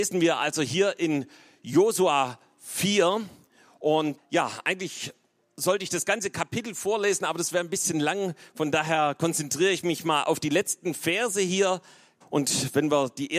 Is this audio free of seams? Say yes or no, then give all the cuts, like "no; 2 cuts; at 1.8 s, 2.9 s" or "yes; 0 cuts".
no; 2 cuts; at 4.2 s, 12.2 s